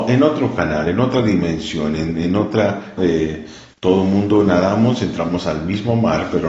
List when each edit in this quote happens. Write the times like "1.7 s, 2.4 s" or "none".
3.0 s